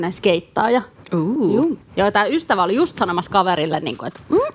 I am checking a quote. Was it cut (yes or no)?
no